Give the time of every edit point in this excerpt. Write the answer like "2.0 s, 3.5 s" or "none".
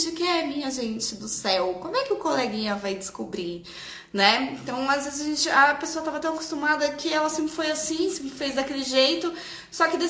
none